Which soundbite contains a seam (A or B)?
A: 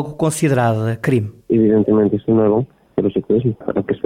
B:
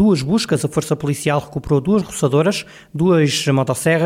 A